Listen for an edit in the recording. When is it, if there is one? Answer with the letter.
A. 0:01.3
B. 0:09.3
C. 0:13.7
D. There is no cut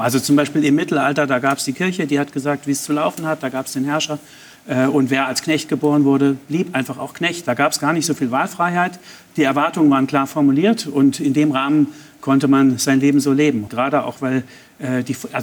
C